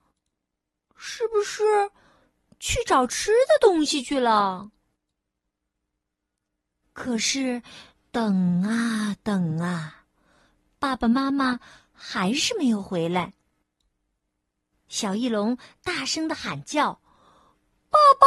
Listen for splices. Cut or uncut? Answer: uncut